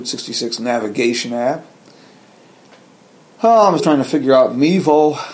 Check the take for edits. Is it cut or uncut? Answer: cut